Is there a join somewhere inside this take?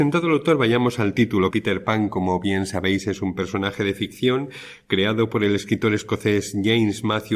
yes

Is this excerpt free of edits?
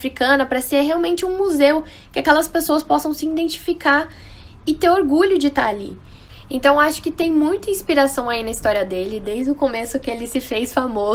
yes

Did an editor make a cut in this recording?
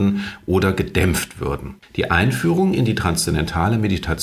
yes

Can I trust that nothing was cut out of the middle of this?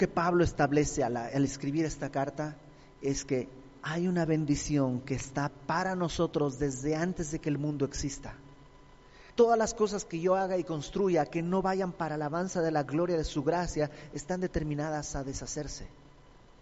no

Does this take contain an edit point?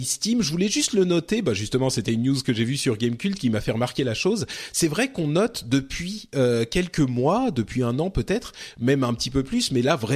no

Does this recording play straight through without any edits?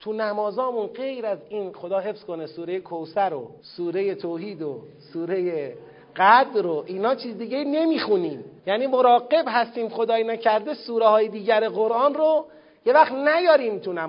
no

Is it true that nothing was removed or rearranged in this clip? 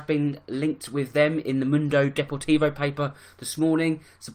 yes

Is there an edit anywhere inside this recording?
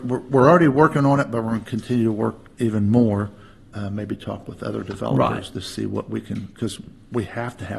yes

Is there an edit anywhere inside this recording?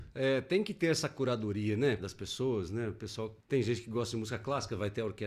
yes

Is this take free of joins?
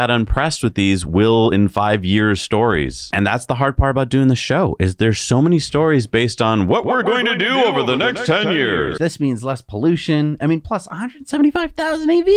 no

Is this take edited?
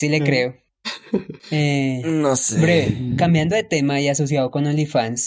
no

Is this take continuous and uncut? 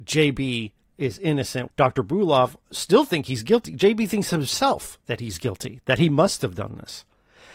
no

